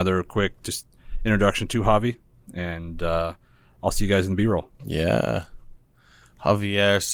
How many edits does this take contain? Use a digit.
0